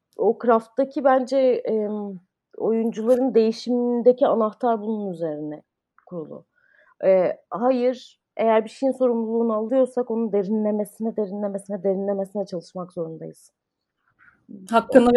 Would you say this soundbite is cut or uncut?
uncut